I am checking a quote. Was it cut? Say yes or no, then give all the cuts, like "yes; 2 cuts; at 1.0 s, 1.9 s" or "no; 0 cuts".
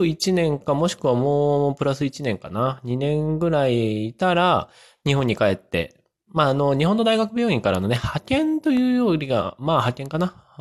no; 0 cuts